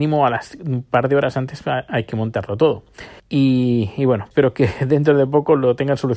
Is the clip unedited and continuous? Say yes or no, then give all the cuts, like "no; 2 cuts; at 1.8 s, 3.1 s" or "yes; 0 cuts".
no; 2 cuts; at 3.2 s, 4.3 s